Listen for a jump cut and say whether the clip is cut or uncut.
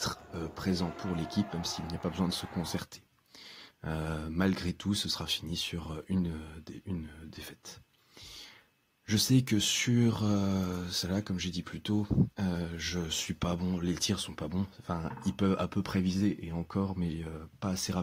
uncut